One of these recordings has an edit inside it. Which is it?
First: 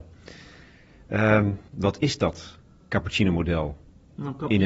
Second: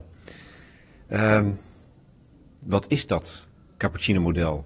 first; 1 cut; at 1.7 s

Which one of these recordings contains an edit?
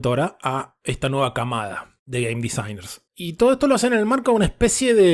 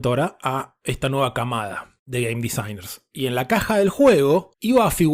first; 1 cut; at 3.1 s

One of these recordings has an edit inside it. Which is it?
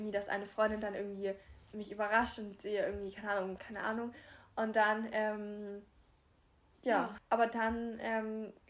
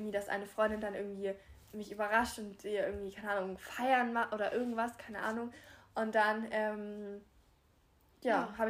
first; 2 cuts; at 3.6 s, 7.2 s

